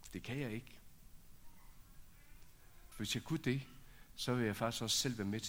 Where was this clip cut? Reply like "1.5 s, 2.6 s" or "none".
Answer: 2.9 s